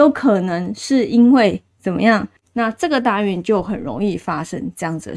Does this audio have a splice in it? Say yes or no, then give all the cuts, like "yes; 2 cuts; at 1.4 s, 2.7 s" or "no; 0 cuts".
yes; 1 cut; at 2.4 s